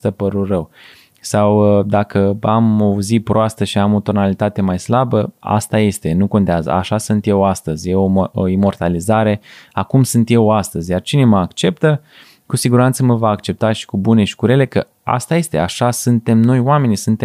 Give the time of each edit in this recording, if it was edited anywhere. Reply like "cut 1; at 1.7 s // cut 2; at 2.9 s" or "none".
none